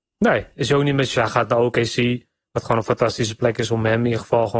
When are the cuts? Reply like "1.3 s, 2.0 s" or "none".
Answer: 1.2 s